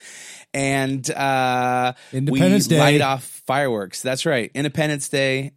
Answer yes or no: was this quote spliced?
no